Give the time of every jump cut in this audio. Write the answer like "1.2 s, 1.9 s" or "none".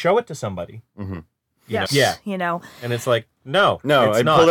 1.8 s